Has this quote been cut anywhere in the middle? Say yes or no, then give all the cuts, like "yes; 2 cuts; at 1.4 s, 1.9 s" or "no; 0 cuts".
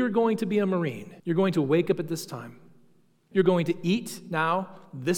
yes; 2 cuts; at 1.2 s, 3.3 s